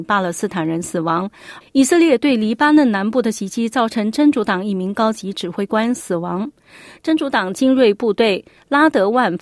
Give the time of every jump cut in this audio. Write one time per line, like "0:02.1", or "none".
0:01.6

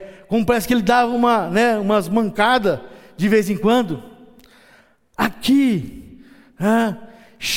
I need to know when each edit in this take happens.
none

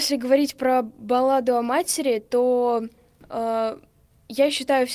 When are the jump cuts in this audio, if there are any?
none

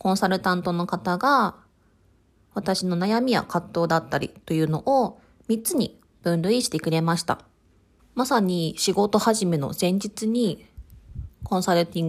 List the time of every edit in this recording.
0:08.0

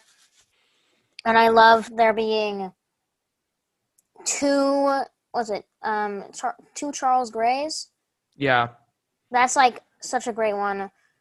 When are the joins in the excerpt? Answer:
0:06.3

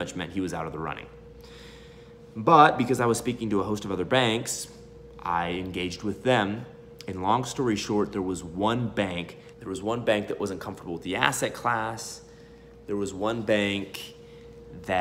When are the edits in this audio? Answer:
0:09.5

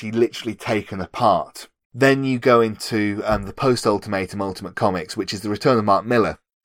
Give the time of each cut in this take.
0:01.8

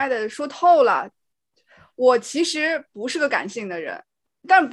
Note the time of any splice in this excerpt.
none

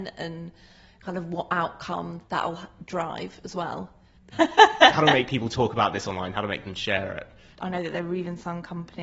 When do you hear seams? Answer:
0:02.3
0:04.3
0:07.5

